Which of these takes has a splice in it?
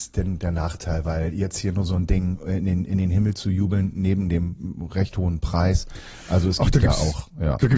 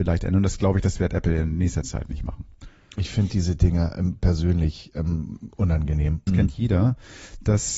second; 1 cut; at 6.3 s

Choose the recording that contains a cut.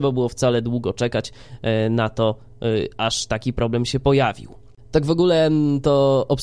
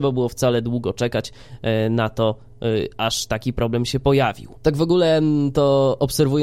second; 1 cut; at 4.6 s

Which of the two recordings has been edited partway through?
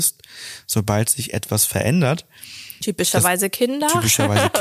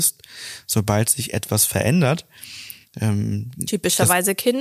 first; 1 cut; at 2.8 s

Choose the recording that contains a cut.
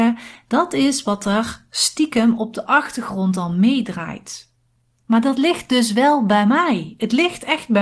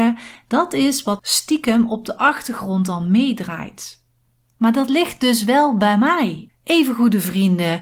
second; 2 cuts; at 1.2 s, 6.5 s

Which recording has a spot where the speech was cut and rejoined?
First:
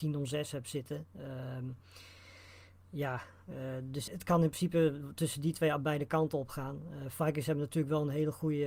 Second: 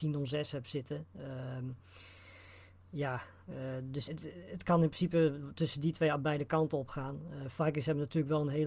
first; 1 cut; at 4.1 s

